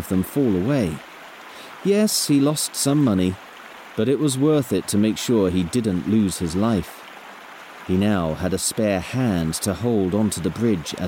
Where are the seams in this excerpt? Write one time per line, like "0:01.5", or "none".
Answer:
none